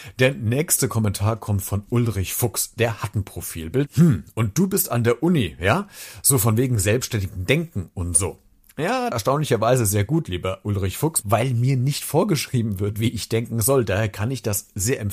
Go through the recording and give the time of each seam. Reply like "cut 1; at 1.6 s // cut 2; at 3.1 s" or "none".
cut 1; at 3.9 s // cut 2; at 9.1 s // cut 3; at 11.2 s

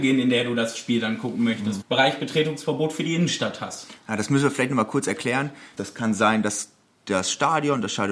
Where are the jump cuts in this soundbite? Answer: cut 1; at 1.8 s // cut 2; at 5.8 s

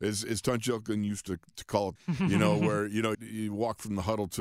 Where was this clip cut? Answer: cut 1; at 2.0 s // cut 2; at 3.1 s

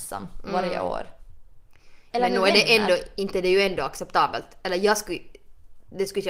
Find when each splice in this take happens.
cut 1; at 2.1 s

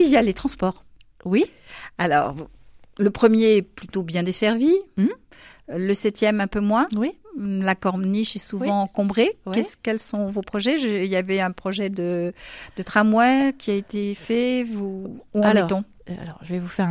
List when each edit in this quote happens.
none

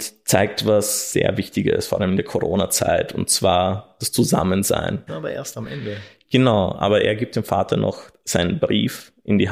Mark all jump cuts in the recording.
cut 1; at 5.1 s

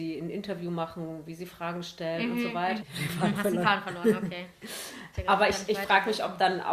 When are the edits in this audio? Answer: cut 1; at 2.8 s // cut 2; at 5.1 s

